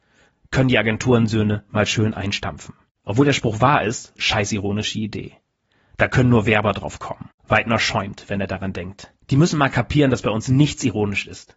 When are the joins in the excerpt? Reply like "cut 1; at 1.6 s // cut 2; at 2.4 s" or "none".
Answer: cut 1; at 4.2 s // cut 2; at 9.2 s

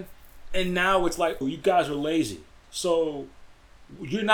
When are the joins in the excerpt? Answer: cut 1; at 1.4 s // cut 2; at 2.6 s

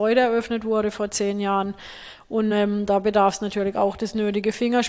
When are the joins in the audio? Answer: none

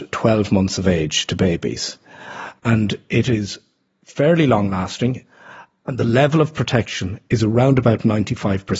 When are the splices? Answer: cut 1; at 2.6 s

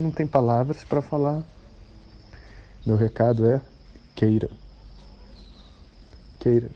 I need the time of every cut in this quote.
cut 1; at 2.8 s

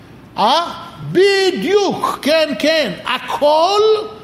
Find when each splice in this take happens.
none

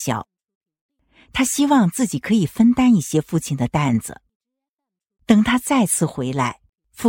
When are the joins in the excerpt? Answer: none

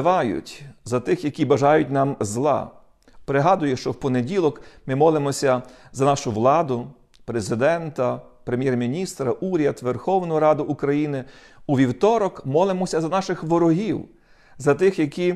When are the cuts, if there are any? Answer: cut 1; at 3.2 s

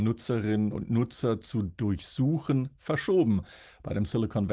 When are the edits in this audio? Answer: none

